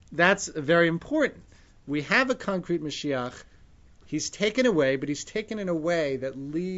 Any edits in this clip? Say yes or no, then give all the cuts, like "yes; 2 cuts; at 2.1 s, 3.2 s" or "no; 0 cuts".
no; 0 cuts